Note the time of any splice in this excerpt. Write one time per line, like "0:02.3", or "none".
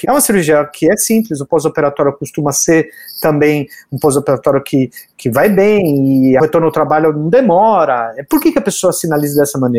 none